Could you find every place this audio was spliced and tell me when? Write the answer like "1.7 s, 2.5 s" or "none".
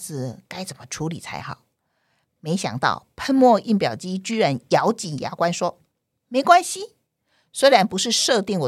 none